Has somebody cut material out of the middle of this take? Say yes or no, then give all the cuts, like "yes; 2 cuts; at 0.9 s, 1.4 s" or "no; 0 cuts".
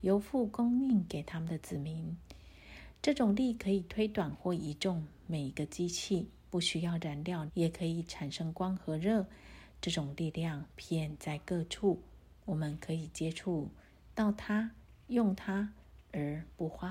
yes; 1 cut; at 7.5 s